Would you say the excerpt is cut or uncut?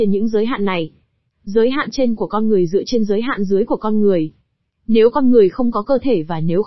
uncut